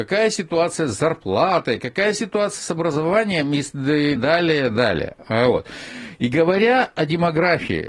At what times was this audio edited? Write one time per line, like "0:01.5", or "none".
0:04.2